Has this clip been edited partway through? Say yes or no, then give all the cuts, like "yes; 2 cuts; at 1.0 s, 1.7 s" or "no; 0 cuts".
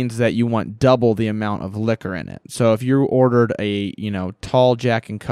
no; 0 cuts